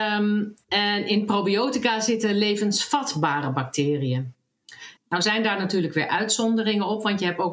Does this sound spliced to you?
yes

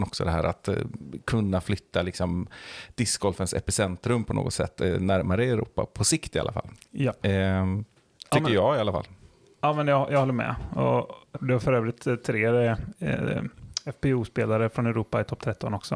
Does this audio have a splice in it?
yes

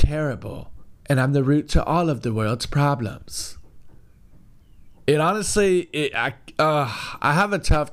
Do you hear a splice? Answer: yes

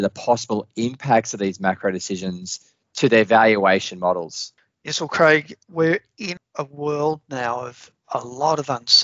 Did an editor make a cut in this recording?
no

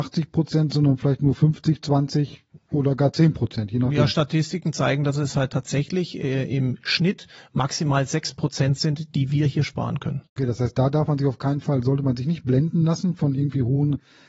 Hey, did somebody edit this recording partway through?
no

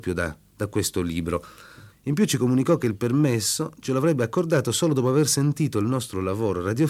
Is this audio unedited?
no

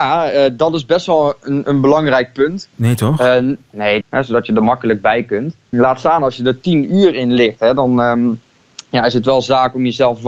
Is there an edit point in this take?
yes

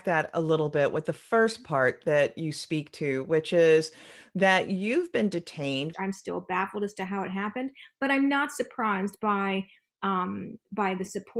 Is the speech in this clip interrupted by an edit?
yes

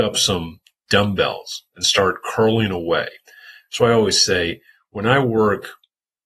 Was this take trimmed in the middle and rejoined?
no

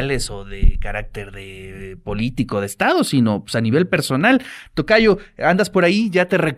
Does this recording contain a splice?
no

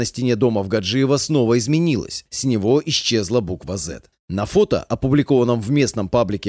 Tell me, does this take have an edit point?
no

